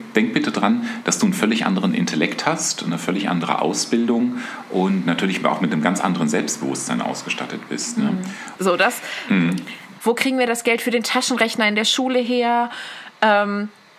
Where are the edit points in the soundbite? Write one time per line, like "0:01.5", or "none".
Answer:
0:08.6
0:10.0

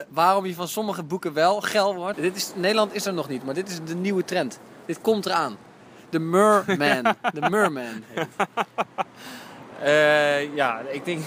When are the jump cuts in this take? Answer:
0:02.1

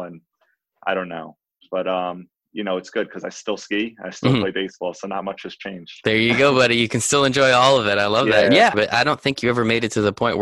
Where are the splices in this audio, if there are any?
0:08.7

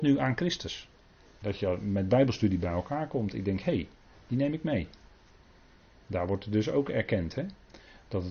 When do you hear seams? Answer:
0:01.4

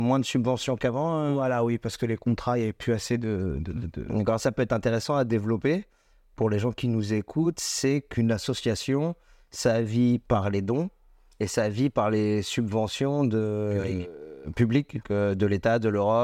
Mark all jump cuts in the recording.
0:04.4
0:15.0

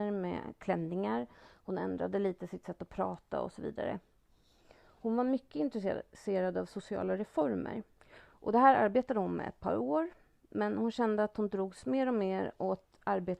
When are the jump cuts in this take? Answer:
0:08.0

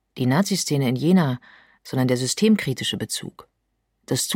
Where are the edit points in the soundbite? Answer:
0:01.8

